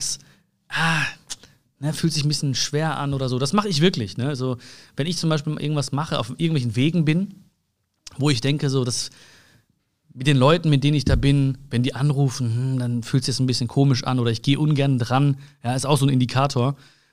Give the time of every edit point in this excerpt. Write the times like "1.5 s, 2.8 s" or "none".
none

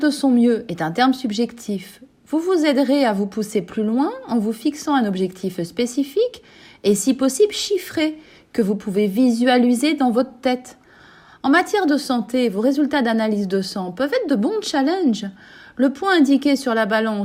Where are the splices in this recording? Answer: none

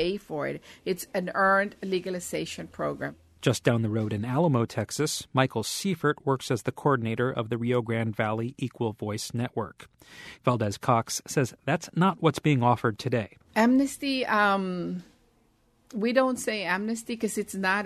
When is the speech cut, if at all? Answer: 10.4 s, 13.5 s

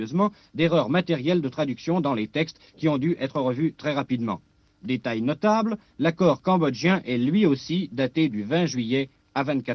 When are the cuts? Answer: none

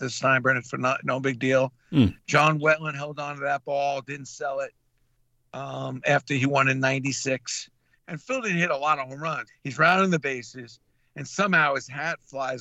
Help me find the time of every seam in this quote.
7.9 s, 9.5 s

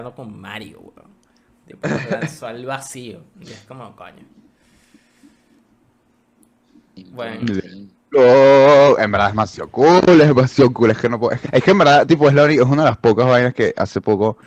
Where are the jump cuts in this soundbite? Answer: 11.4 s

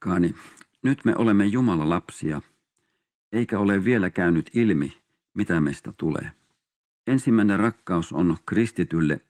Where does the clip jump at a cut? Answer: 6.9 s

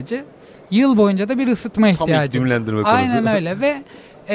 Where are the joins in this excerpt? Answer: none

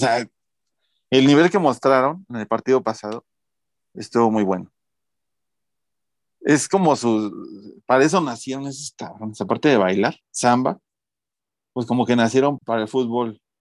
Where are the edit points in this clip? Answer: 10.2 s, 12.6 s

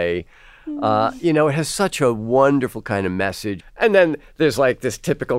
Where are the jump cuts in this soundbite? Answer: 3.6 s

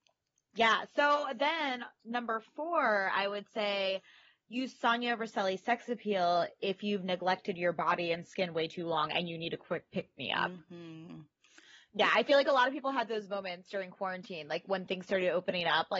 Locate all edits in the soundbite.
none

